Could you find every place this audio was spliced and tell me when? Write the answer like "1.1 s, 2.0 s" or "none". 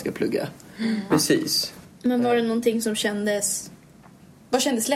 1.1 s